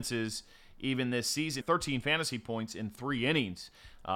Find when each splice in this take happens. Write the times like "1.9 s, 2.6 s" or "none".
1.6 s